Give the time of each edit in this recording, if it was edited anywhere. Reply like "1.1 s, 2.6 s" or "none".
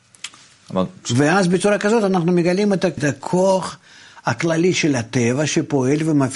3.0 s